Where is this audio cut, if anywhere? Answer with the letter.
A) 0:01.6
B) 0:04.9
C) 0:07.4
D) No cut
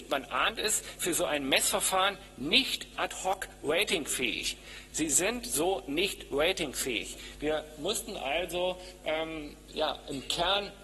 B